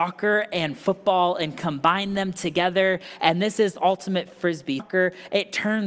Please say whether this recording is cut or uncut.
cut